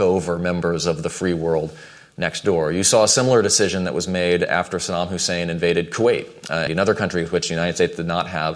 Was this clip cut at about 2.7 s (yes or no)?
no